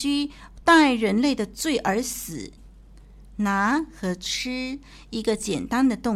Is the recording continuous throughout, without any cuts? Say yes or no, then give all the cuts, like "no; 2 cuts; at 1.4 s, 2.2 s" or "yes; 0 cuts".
no; 1 cut; at 2.6 s